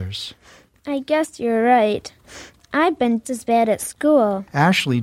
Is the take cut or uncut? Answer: cut